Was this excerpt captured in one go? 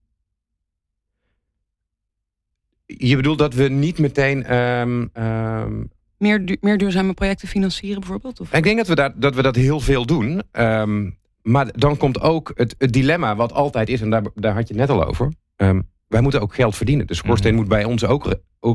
yes; 0 cuts

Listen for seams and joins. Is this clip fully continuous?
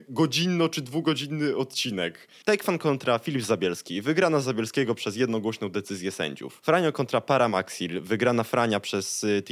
no; 1 cut; at 2.4 s

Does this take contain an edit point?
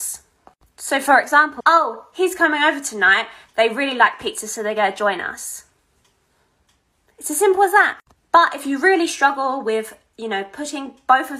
yes; 1 cut; at 1.6 s

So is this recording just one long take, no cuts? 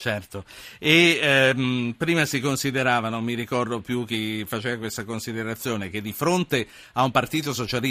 yes; 0 cuts

